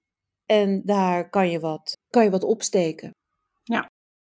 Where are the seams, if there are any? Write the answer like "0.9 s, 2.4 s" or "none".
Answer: 1.9 s